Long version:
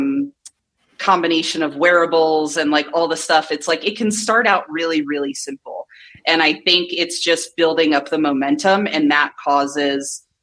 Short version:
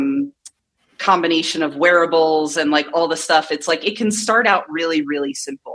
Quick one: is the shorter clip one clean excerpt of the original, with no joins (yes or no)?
yes